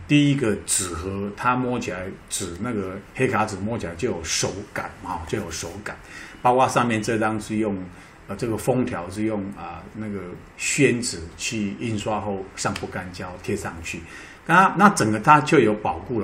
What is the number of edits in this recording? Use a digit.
1